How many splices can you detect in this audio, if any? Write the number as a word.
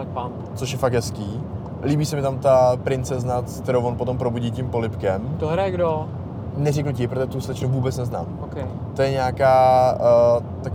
zero